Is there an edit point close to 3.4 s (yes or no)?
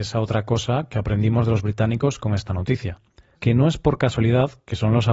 yes